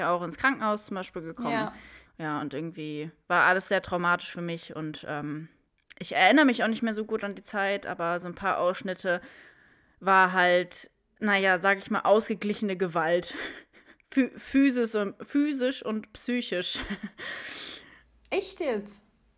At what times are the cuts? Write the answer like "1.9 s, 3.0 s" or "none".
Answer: 2.0 s